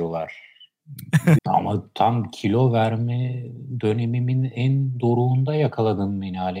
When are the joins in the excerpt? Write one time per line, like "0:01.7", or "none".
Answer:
0:01.4